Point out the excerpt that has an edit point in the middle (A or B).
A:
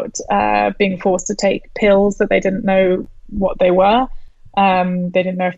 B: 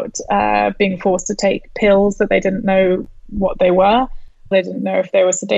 B